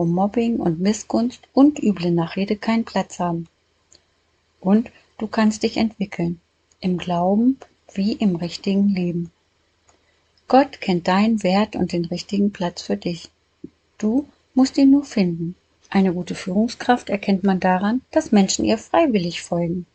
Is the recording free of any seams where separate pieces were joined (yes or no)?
no